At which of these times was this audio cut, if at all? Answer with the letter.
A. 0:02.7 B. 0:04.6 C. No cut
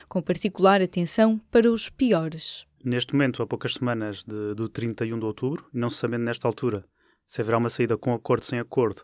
A